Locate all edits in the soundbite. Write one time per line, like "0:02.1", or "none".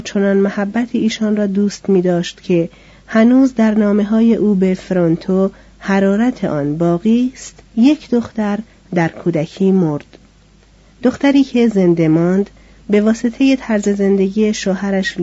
0:07.7